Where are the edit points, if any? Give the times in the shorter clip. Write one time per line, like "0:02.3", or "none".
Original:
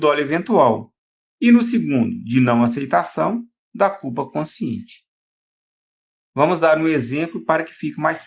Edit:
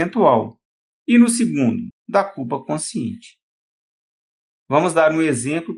0:01.9